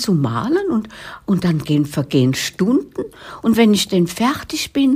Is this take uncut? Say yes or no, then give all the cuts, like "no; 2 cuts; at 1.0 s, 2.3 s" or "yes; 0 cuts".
yes; 0 cuts